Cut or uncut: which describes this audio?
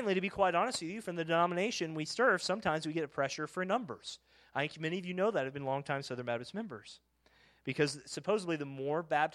uncut